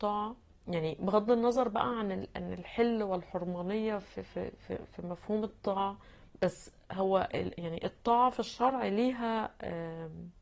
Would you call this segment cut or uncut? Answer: uncut